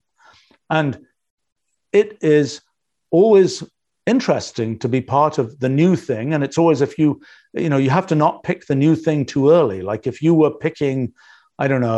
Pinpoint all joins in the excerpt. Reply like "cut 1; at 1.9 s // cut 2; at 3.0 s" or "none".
none